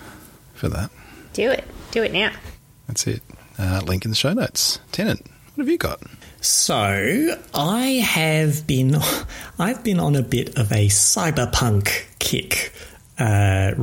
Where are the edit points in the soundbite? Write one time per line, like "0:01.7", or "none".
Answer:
none